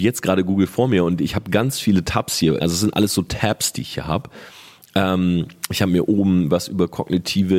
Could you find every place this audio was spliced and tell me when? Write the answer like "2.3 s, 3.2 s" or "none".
2.6 s